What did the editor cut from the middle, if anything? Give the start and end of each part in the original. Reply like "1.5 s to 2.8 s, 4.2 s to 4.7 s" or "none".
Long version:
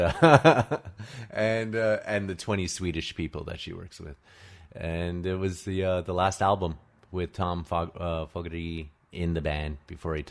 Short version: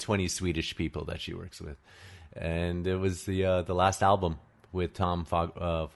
none

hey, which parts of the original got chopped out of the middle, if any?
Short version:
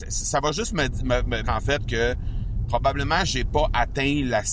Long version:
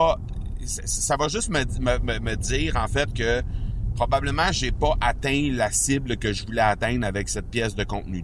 2.2 s to 2.7 s

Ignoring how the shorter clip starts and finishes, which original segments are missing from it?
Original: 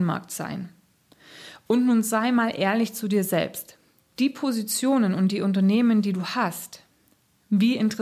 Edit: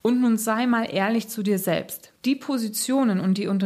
3.8 s to 4.1 s

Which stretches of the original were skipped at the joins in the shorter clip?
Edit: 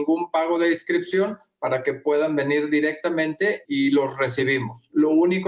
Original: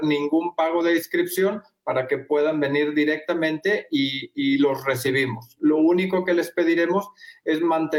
3.9 s to 4.3 s

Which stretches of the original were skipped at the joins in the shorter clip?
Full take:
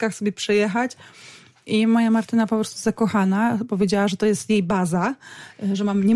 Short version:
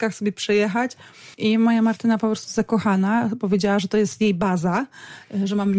1.3 s to 1.6 s

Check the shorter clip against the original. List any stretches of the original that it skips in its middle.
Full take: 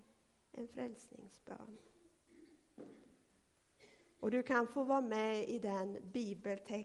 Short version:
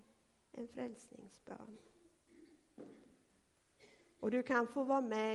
none

